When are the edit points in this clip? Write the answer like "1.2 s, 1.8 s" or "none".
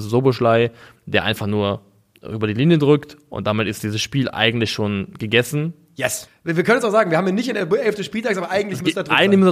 6.3 s